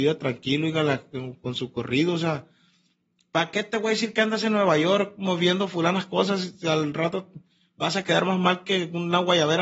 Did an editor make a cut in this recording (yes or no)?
no